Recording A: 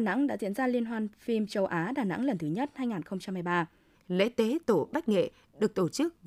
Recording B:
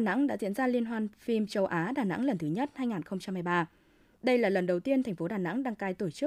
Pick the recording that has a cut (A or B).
A